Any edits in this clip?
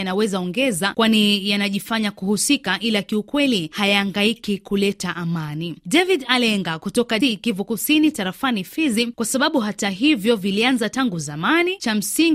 yes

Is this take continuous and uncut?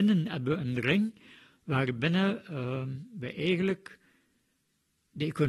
yes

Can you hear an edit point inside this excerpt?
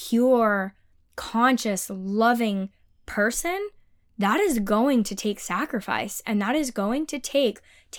no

